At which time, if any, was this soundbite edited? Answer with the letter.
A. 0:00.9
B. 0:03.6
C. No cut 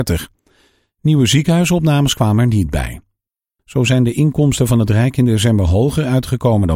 B